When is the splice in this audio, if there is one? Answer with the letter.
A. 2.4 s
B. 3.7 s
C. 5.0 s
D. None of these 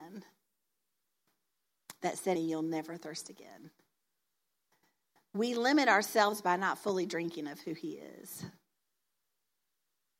A